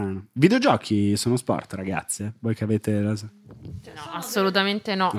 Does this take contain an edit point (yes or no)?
no